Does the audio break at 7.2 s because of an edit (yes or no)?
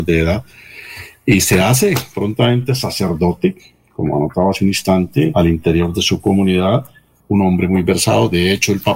yes